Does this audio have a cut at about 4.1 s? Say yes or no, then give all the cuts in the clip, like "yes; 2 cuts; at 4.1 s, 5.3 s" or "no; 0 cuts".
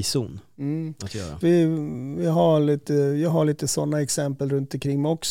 no; 1 cut; at 1.4 s